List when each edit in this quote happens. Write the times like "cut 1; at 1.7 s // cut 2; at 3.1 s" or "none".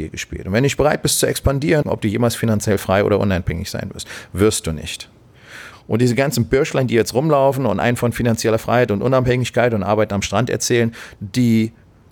cut 1; at 1.8 s // cut 2; at 5.7 s // cut 3; at 11.1 s